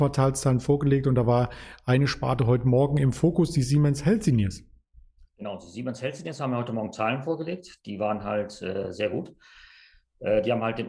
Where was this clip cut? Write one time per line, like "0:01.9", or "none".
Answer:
none